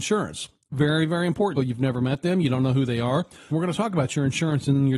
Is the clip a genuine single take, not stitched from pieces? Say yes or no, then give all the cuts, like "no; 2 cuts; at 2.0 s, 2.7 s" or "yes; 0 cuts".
no; 2 cuts; at 1.5 s, 3.5 s